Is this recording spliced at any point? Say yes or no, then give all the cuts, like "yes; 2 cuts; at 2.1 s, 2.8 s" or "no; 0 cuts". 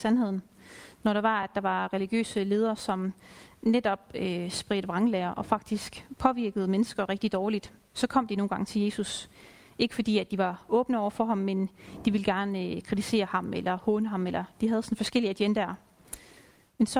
no; 0 cuts